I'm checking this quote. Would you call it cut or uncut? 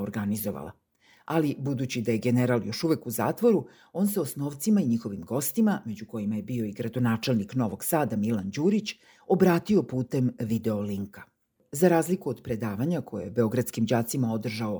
uncut